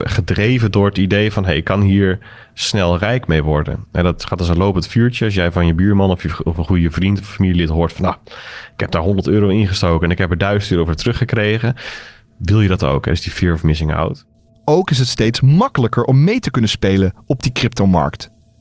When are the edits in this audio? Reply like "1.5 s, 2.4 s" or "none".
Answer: 14.5 s